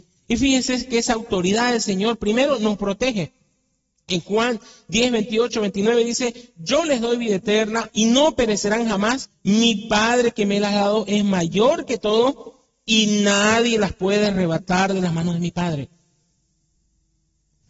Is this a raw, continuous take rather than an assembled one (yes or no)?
no